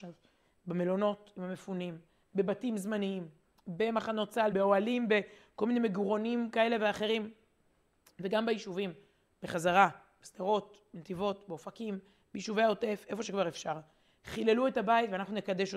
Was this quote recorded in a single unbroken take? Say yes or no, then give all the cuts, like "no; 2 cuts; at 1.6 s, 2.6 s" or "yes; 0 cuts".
no; 1 cut; at 4.5 s